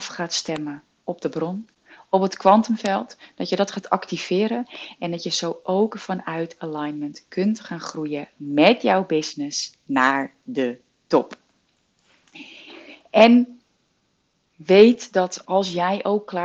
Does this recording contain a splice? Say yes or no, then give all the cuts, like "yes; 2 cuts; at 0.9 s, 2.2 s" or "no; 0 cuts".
no; 0 cuts